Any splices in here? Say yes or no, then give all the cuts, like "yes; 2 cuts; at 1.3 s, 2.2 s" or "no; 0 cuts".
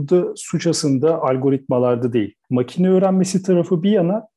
no; 0 cuts